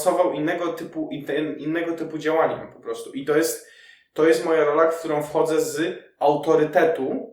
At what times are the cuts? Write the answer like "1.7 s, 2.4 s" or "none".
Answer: none